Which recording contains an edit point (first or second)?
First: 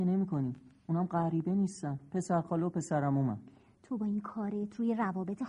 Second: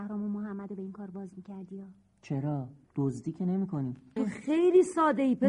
second